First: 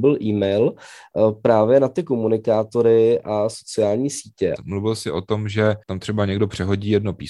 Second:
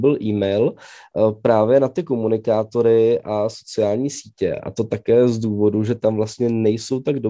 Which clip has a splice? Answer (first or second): first